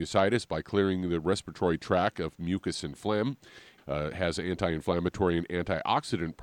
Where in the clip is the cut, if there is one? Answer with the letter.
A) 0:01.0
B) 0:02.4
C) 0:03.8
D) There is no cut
C